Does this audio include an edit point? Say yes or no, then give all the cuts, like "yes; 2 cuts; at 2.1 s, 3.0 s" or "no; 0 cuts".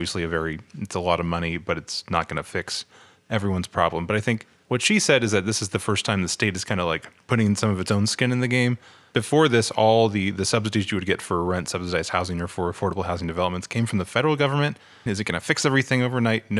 yes; 1 cut; at 15.1 s